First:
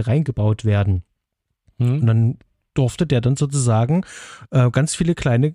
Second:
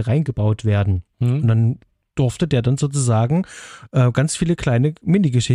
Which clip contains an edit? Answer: second; 1 cut; at 1.1 s

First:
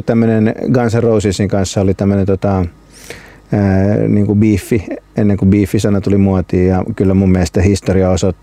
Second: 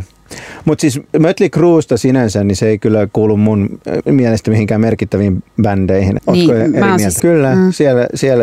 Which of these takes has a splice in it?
second; 3 cuts; at 4.1 s, 6.2 s, 7.2 s

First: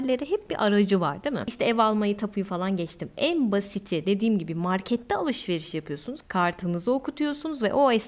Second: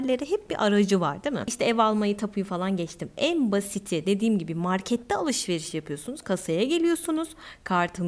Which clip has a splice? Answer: first; 1 cut; at 6.2 s

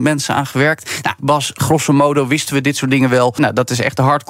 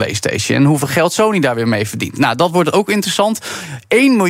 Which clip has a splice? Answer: first; 2 cuts; at 1.2 s, 3.4 s

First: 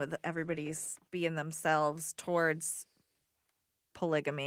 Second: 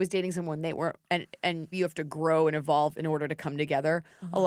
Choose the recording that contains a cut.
second; 1 cut; at 1.7 s

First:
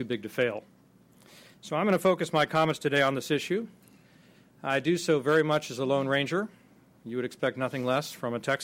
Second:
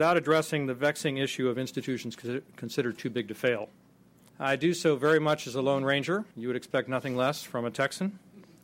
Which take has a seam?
second; 2 cuts; at 4.3 s, 6.3 s

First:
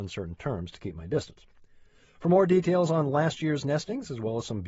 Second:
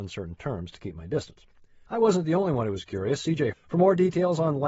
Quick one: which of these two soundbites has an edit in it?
second; 2 cuts; at 1.9 s, 3.5 s

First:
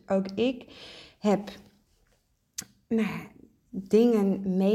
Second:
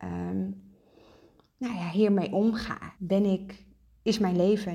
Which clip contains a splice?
second; 1 cut; at 3.0 s

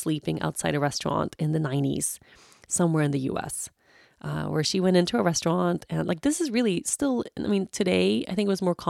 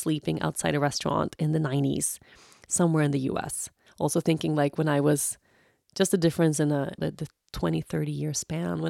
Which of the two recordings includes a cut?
second; 2 cuts; at 3.9 s, 7.0 s

